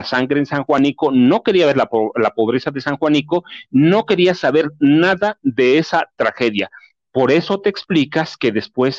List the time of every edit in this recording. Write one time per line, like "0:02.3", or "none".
none